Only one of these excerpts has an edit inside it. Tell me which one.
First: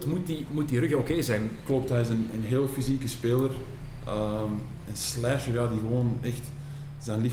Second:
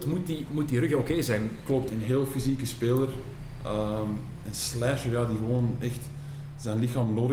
second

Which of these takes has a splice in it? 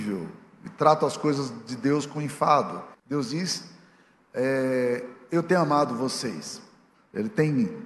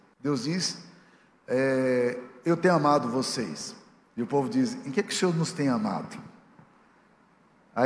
first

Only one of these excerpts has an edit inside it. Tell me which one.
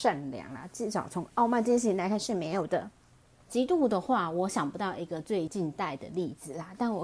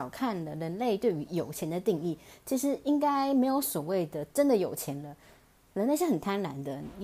first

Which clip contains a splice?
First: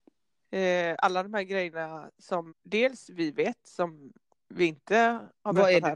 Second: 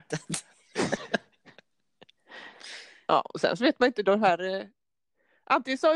first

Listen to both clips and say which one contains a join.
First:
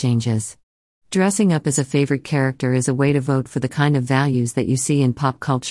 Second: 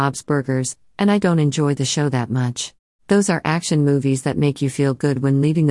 second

